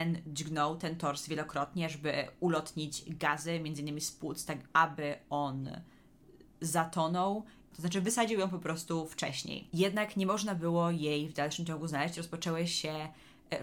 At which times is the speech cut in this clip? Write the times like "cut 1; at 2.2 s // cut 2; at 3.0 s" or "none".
cut 1; at 4.7 s // cut 2; at 7.7 s

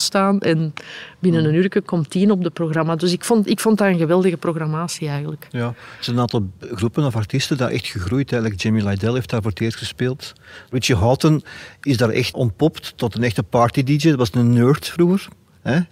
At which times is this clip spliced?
cut 1; at 12.3 s

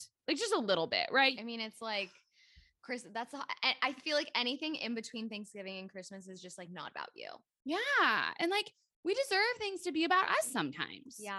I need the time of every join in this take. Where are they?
cut 1; at 1.3 s

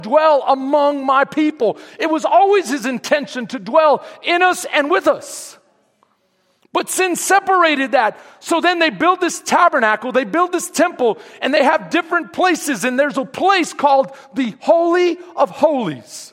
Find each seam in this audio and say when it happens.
none

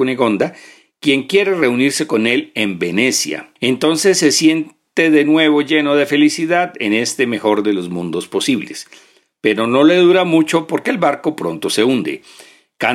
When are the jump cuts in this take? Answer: cut 1; at 3.6 s

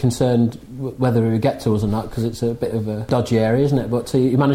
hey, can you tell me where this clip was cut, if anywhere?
none

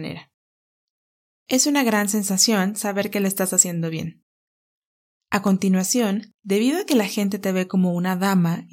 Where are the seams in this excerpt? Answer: cut 1; at 5.2 s

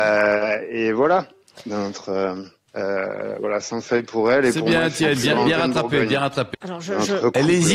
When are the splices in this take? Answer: cut 1; at 2.7 s // cut 2; at 6.5 s

